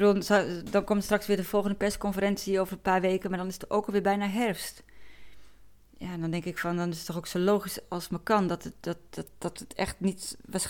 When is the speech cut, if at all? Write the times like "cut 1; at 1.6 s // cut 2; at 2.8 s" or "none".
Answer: none